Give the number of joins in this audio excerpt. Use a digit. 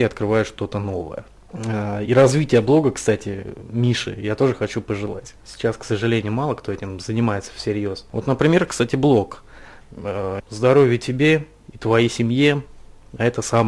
2